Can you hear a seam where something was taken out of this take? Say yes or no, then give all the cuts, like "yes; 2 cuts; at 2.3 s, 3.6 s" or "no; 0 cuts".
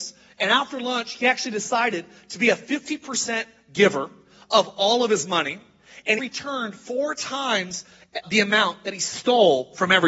yes; 2 cuts; at 6.2 s, 8.2 s